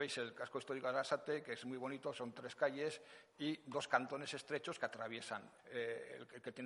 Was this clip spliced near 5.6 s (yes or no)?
yes